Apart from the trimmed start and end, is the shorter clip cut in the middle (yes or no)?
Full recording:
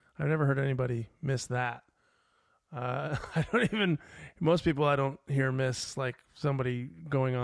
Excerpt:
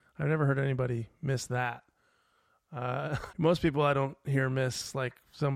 yes